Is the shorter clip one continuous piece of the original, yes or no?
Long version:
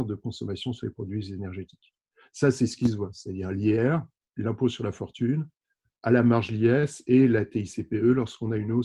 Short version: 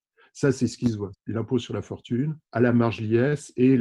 no